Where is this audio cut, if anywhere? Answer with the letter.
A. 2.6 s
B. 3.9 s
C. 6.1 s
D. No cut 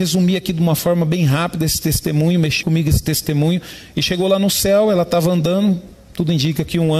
A